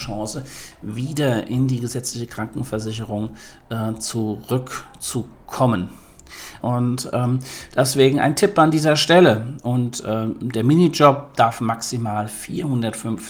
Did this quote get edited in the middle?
yes; 2 cuts; at 6.6 s, 9.6 s

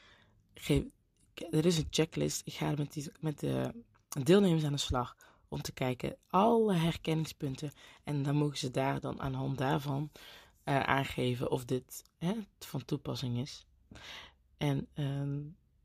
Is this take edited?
no; 0 cuts

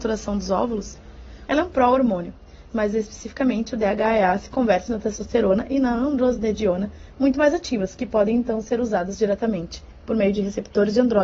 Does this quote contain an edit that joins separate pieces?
yes; 2 cuts; at 1.5 s, 2.7 s

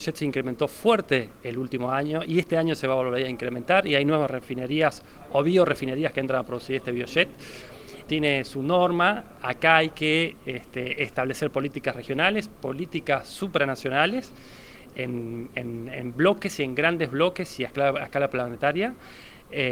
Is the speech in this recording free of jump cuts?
no; 1 cut; at 8.1 s

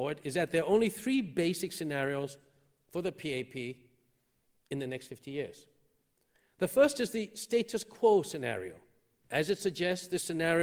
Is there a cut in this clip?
no; 0 cuts

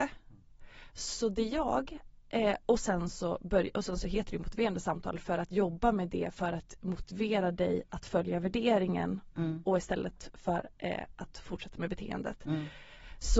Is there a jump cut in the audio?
no; 0 cuts

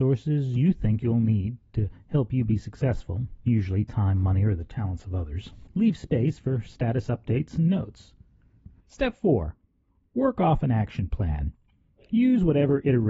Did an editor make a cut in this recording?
yes; 1 cut; at 8.8 s

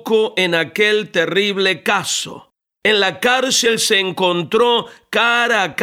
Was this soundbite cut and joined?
yes; 1 cut; at 2.7 s

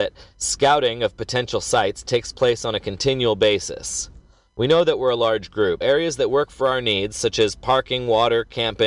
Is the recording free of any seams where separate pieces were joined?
no; 1 cut; at 5.8 s

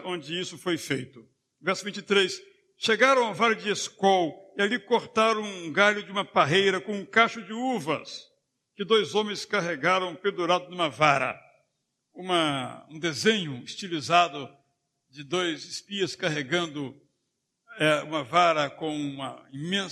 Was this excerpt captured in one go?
yes; 0 cuts

